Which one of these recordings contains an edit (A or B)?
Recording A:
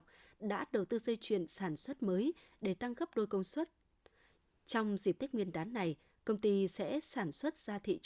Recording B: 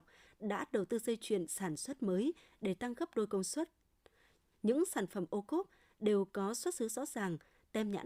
B